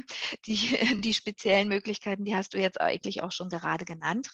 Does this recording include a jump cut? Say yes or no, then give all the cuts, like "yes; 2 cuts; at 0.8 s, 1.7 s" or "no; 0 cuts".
no; 0 cuts